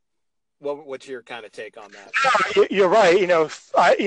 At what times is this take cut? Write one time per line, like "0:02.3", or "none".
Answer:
none

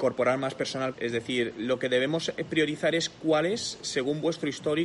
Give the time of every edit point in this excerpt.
0:00.9

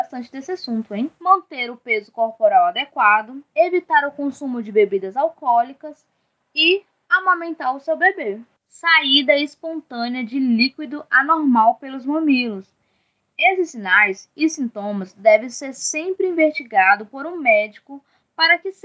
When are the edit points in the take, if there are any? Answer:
0:03.5
0:08.6

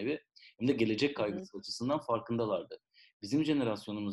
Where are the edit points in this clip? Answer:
none

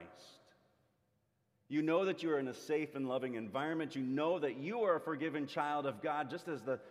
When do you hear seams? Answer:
none

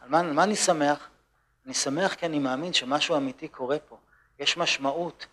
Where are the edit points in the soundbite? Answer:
none

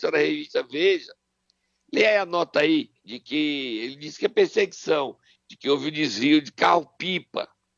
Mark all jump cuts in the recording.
0:03.0

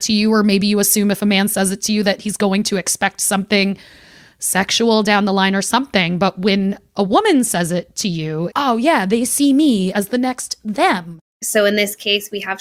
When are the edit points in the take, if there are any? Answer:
0:08.5
0:11.4

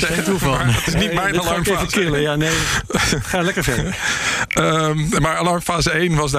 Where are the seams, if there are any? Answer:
none

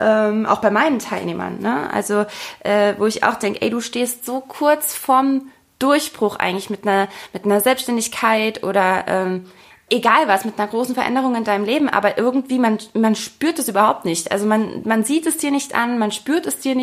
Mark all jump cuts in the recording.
none

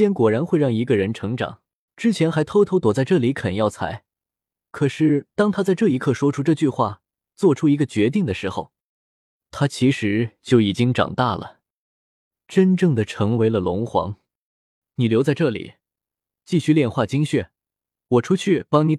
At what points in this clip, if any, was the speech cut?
0:01.9
0:14.8

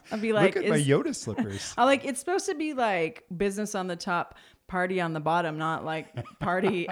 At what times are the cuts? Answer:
none

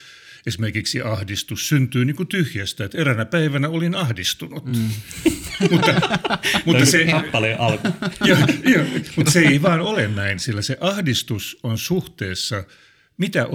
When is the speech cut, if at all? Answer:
none

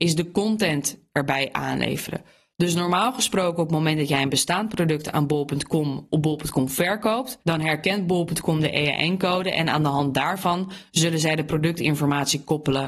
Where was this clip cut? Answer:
none

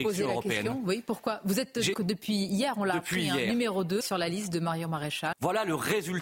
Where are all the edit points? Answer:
0:01.9
0:04.0
0:05.3

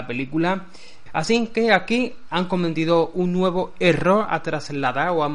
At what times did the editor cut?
0:01.1

